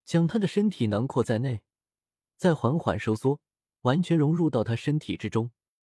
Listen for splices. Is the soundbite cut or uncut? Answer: uncut